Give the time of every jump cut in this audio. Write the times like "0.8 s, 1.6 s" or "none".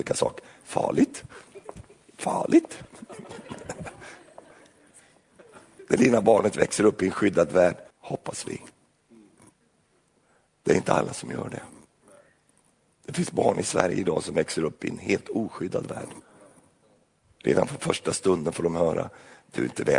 7.9 s